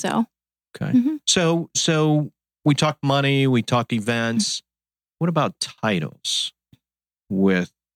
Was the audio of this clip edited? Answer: no; 0 cuts

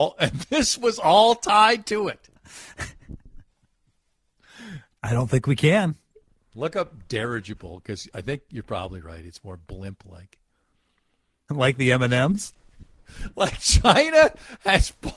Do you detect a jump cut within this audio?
yes; 3 cuts; at 4.9 s, 6.5 s, 11.5 s

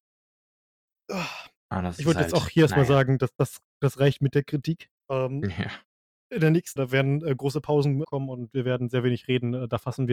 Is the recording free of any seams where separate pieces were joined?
no; 3 cuts; at 5.0 s, 6.8 s, 8.0 s

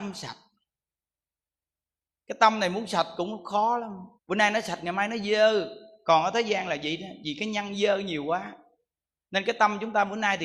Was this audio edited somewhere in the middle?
yes; 1 cut; at 4.2 s

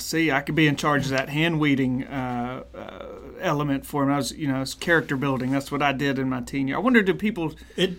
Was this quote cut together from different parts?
no; 0 cuts

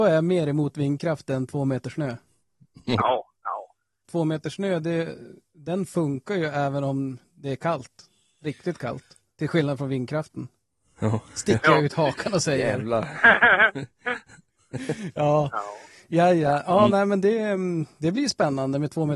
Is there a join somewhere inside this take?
no; 0 cuts

